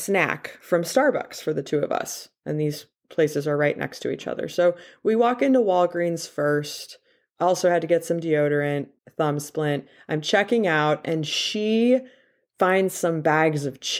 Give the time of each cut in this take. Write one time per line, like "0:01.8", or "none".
0:09.0